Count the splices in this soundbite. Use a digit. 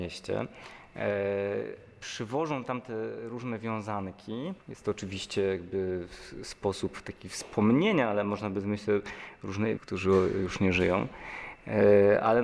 2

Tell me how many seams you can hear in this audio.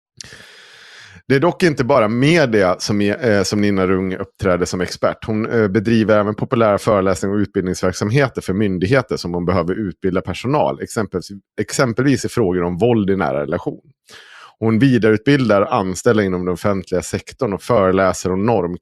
0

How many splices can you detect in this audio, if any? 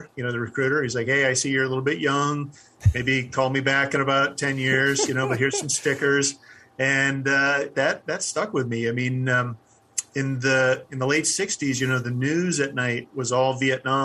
1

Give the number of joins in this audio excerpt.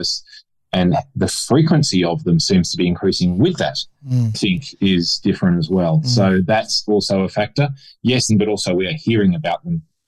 2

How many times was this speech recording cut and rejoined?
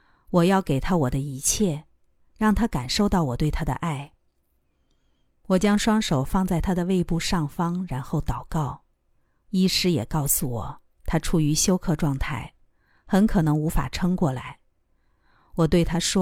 1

